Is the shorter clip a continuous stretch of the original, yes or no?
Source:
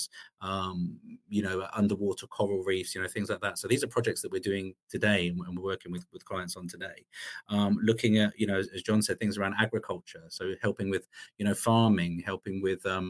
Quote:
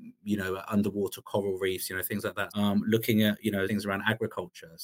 no